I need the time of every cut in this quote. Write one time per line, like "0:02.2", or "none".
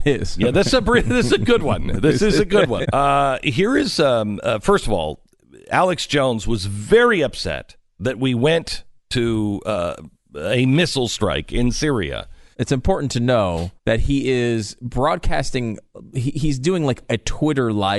0:02.8
0:12.5
0:13.8